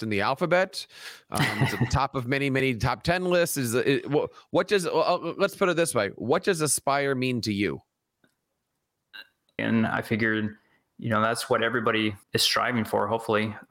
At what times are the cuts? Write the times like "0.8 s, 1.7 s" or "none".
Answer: 9.6 s, 12.2 s

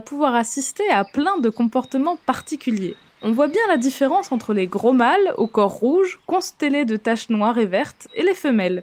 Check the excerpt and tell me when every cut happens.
3.1 s

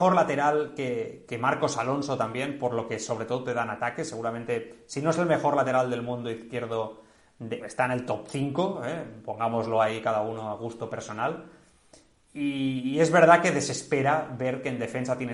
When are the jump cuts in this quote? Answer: 7.6 s

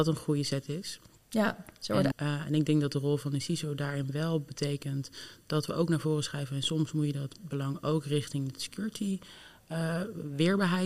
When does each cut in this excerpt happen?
2.1 s

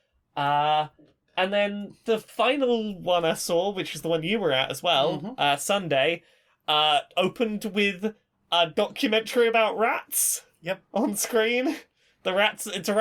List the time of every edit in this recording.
none

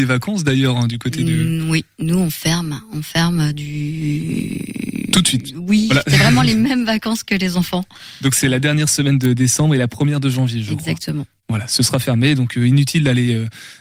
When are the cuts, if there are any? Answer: none

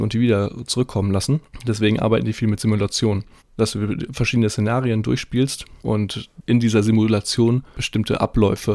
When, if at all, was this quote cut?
3.4 s, 5.8 s

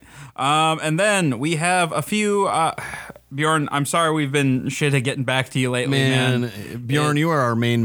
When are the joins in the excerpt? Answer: none

